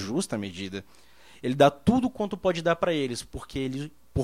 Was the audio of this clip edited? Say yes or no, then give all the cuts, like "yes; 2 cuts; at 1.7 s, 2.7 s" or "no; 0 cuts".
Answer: no; 0 cuts